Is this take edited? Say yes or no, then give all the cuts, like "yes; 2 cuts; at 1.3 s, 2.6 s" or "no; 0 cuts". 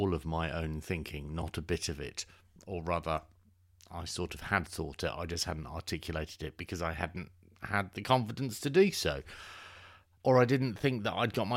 no; 0 cuts